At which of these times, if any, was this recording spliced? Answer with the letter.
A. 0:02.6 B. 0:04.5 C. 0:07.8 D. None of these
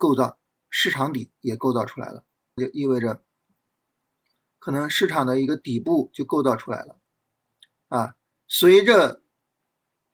A